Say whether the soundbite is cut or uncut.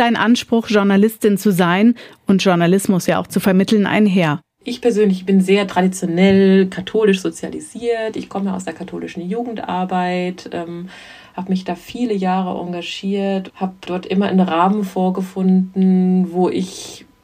uncut